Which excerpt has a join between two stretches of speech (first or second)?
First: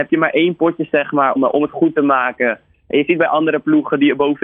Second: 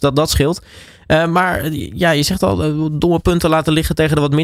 first